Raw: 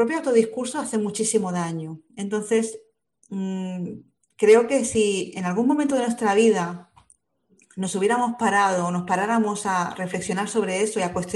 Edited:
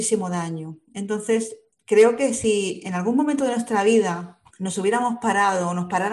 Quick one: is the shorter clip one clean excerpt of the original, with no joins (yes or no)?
no